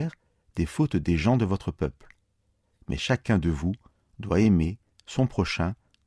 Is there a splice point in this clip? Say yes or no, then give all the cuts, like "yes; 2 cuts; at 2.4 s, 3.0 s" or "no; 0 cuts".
no; 0 cuts